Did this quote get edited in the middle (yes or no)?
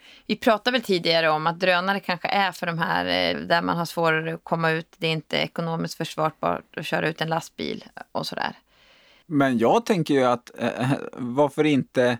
yes